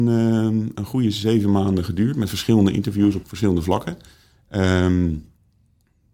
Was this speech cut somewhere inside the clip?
yes; 1 cut; at 3.2 s

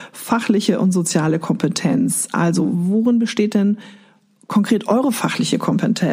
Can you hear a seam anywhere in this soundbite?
no; 0 cuts

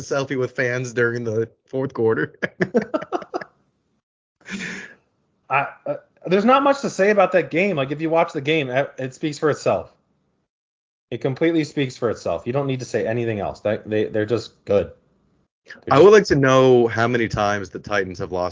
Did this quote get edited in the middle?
no; 0 cuts

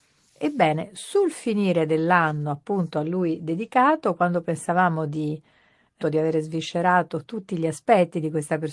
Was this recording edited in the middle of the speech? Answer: yes; 1 cut; at 6.0 s

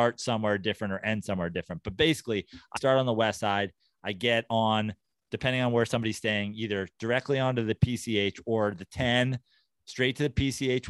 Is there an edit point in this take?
yes; 1 cut; at 2.8 s

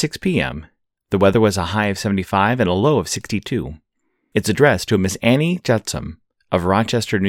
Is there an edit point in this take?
no; 0 cuts

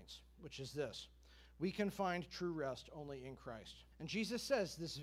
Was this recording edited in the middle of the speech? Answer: yes; 1 cut; at 3.9 s

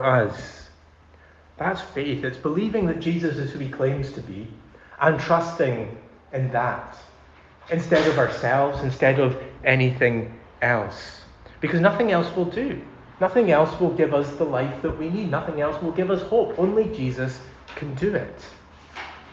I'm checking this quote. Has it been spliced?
yes; 2 cuts; at 13.1 s, 16.5 s

